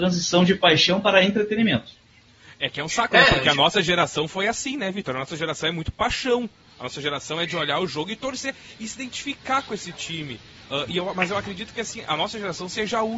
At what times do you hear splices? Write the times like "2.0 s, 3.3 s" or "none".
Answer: none